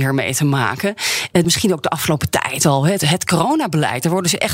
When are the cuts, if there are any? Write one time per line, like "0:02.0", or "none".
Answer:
0:01.4